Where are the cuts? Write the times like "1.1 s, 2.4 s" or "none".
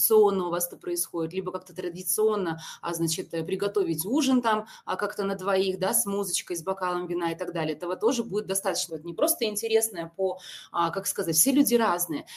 8.9 s